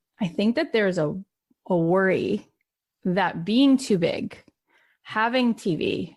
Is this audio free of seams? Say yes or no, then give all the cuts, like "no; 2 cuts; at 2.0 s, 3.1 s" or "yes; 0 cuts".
yes; 0 cuts